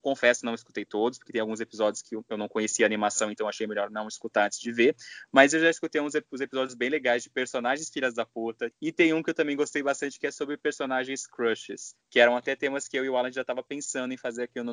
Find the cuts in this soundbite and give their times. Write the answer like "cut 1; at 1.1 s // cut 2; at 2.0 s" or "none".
cut 1; at 8.7 s